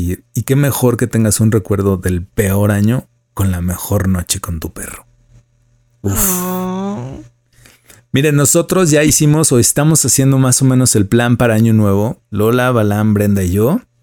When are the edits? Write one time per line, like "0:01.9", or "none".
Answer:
0:12.2